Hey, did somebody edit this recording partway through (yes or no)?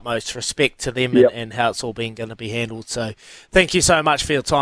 no